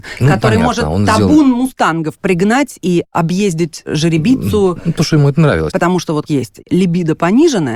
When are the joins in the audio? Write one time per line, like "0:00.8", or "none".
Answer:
0:05.7